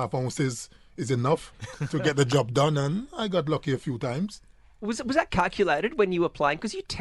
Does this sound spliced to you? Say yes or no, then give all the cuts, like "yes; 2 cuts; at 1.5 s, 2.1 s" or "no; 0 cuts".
no; 0 cuts